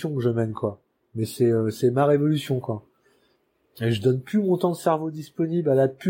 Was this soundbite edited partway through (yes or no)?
no